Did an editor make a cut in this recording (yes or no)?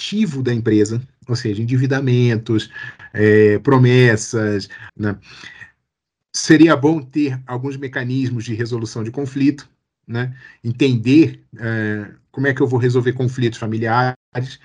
yes